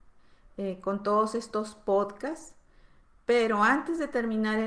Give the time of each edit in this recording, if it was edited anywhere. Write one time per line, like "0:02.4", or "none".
none